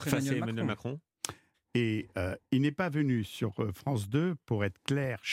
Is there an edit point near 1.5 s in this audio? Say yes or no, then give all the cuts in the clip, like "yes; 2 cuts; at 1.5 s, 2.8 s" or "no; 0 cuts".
yes; 1 cut; at 1.5 s